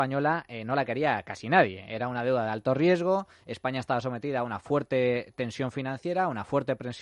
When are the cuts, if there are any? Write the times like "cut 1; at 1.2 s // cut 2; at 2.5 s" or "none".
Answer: none